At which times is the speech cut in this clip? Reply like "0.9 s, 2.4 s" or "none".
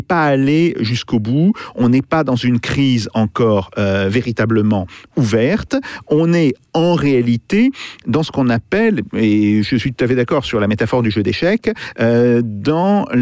none